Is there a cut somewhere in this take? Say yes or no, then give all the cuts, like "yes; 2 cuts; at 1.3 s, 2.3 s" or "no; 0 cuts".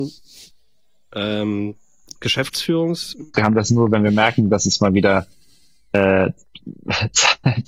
yes; 1 cut; at 3.3 s